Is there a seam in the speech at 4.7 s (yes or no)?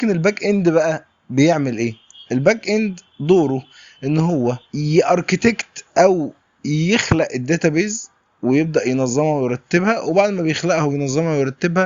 yes